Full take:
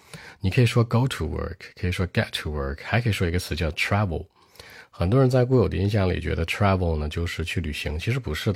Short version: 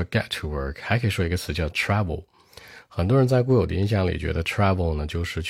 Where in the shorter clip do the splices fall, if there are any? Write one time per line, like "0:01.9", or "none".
none